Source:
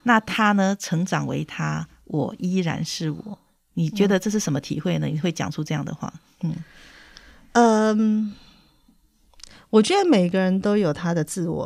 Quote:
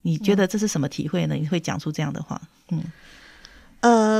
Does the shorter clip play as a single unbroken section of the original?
yes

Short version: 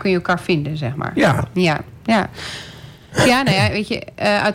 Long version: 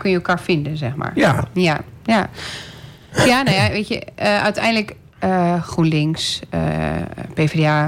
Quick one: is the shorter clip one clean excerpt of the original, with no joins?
yes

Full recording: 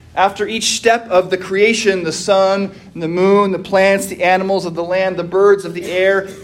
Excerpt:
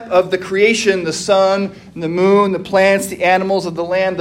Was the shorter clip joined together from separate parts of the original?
no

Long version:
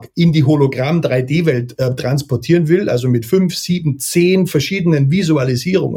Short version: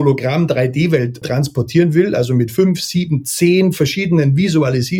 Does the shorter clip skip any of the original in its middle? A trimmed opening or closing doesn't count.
yes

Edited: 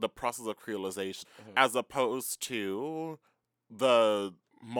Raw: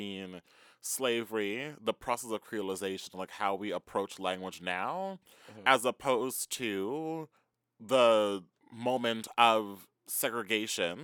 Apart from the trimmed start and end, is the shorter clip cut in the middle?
yes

